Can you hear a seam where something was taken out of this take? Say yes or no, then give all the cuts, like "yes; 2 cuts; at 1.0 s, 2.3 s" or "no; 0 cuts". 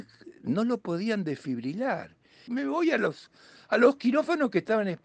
yes; 1 cut; at 2.5 s